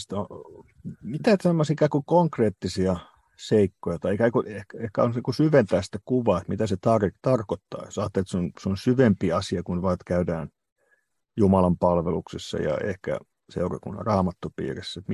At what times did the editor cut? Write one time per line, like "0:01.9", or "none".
none